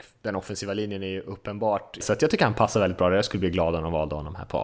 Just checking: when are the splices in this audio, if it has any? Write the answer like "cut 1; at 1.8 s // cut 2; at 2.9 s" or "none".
cut 1; at 2.0 s

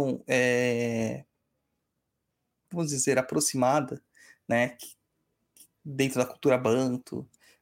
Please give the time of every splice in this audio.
none

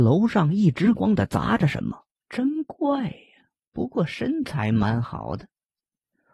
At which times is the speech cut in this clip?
cut 1; at 0.9 s // cut 2; at 2.2 s

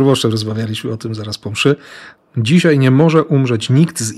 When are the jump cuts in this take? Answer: cut 1; at 2.2 s

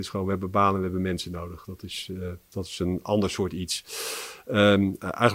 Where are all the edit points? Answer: none

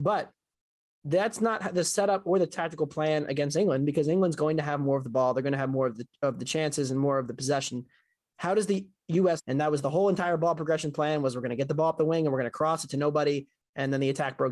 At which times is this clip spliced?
cut 1; at 9.4 s

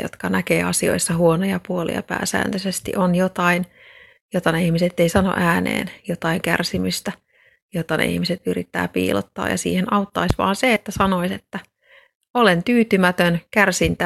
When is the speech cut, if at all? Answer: none

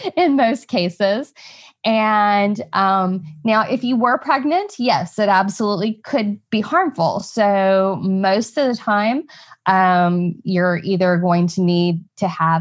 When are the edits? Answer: none

